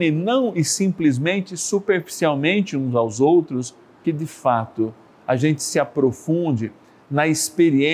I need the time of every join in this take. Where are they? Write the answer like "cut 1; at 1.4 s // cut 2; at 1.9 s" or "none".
cut 1; at 4.0 s